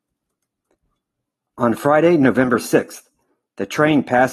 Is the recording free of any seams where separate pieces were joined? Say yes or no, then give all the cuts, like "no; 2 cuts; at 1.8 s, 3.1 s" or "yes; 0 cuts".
yes; 0 cuts